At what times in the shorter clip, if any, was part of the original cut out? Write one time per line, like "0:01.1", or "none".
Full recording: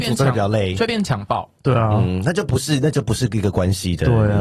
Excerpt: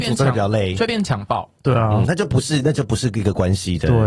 0:02.0